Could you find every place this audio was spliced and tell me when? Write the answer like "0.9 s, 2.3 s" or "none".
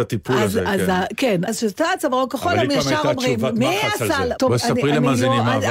1.5 s, 4.4 s